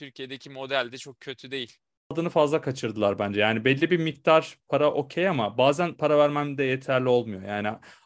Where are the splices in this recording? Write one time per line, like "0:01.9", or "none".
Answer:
none